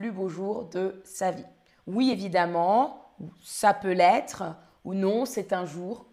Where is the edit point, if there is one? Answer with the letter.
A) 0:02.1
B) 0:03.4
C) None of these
C